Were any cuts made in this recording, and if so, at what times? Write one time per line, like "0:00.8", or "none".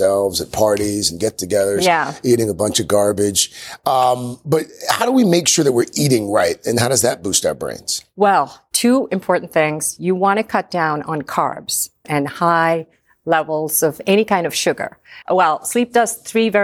0:12.0
0:15.2